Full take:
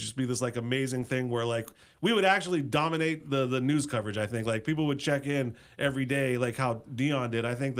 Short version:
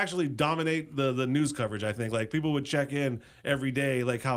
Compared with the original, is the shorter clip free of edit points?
yes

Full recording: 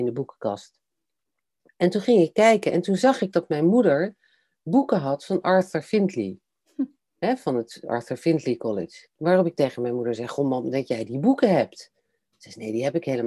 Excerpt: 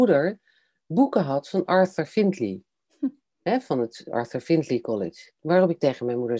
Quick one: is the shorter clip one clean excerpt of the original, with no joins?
yes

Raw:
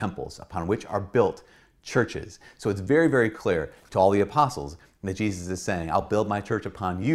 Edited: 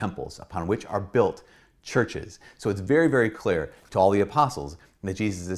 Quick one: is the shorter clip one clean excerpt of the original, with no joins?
yes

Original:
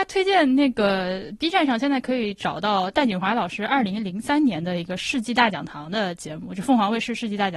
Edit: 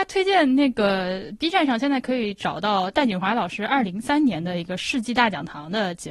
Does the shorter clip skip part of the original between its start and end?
yes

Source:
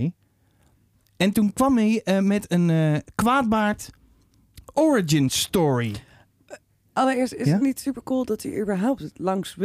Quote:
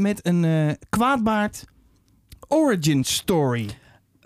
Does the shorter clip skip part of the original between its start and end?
no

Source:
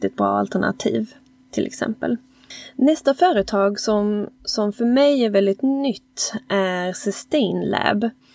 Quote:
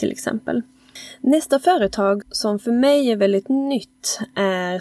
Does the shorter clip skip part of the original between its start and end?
yes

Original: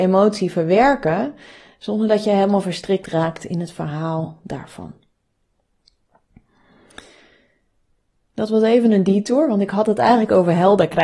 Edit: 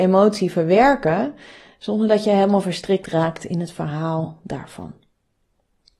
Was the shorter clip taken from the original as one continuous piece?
yes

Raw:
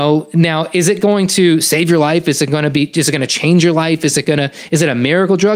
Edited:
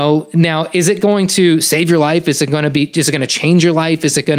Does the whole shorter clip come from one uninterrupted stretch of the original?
yes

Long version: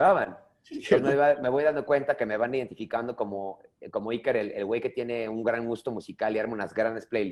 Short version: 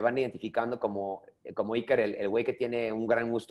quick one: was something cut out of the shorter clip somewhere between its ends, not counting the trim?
no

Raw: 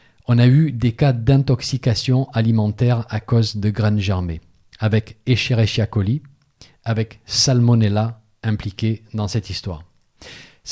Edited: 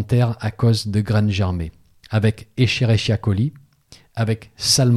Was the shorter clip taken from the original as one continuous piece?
yes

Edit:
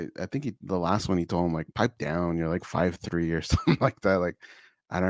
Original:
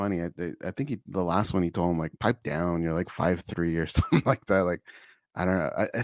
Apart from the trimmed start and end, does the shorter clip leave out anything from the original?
no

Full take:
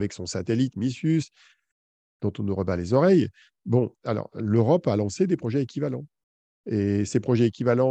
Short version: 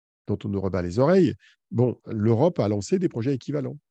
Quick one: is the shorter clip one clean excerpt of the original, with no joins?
no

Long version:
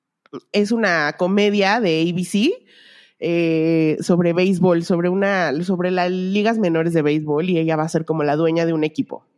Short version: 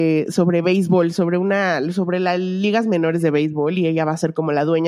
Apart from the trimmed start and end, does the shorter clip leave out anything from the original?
no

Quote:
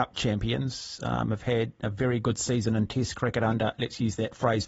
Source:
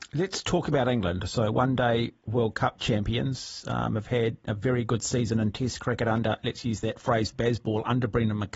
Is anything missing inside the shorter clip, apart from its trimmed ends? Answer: no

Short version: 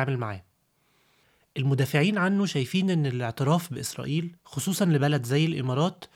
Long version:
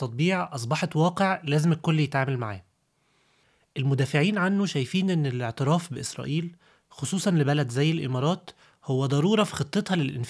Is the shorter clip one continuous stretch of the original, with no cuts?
no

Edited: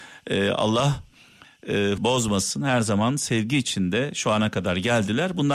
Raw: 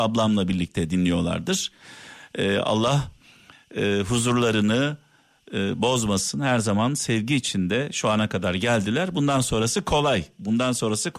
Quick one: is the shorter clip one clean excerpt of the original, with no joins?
no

